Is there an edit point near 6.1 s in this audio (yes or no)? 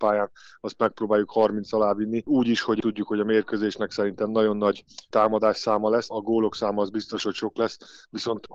yes